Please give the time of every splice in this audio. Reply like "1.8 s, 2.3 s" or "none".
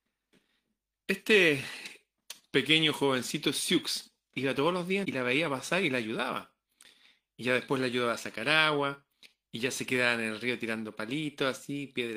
5.0 s